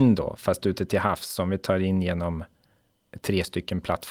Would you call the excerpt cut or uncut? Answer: uncut